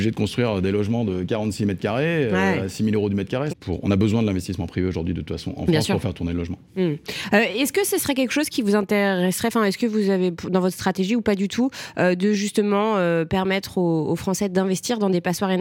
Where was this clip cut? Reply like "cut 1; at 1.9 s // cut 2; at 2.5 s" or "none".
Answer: cut 1; at 3.5 s